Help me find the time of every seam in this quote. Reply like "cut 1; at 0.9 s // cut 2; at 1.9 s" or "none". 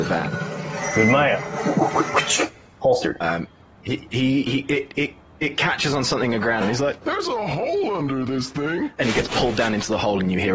cut 1; at 6.6 s // cut 2; at 9.0 s